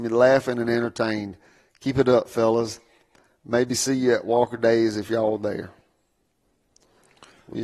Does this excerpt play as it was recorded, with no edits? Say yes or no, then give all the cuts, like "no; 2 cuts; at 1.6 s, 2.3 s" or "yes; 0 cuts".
yes; 0 cuts